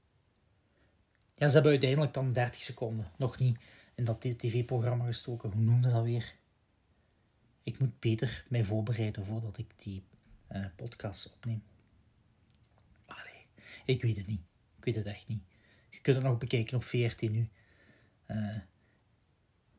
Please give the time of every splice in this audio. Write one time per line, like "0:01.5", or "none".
none

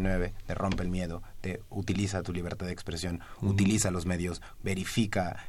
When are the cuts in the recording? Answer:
0:04.6

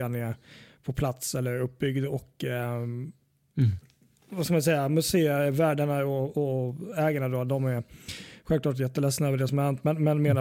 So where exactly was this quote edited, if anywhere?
none

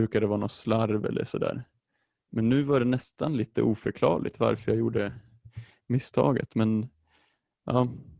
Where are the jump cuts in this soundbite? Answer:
none

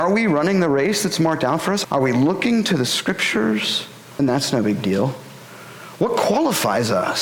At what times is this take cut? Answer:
0:01.8
0:04.2

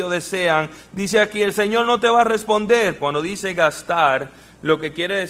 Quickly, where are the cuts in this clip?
0:03.0

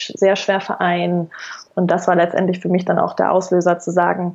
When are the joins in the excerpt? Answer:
0:01.7

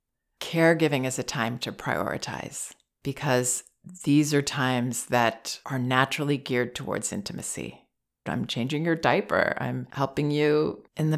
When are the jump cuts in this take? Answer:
0:08.3

